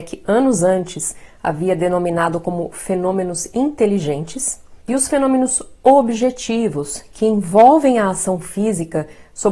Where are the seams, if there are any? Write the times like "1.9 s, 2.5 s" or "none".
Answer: 4.8 s

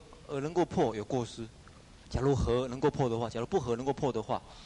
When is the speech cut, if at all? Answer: 2.0 s

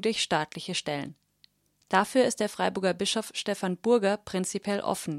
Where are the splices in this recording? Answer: none

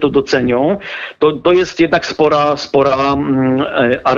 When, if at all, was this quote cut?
none

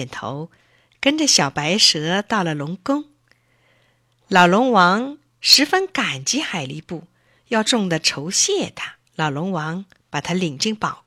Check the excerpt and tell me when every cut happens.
7.7 s, 9.1 s

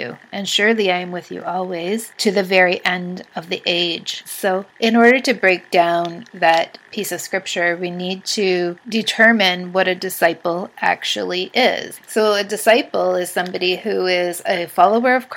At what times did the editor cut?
4.2 s

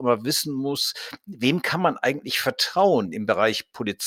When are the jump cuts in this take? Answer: none

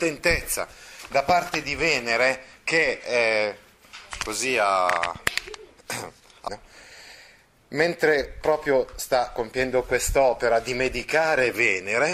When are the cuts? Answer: 6.5 s

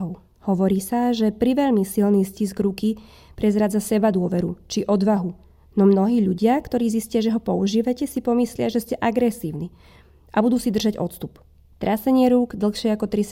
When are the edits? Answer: 11.7 s

